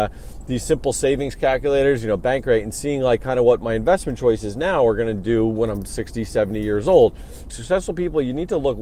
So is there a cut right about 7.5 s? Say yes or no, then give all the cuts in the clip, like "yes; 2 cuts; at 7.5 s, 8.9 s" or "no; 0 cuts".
yes; 1 cut; at 7.5 s